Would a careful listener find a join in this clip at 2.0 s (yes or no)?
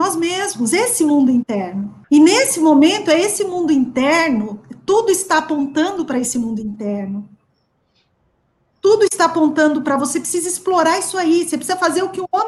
yes